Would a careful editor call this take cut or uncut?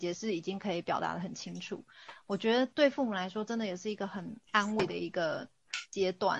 uncut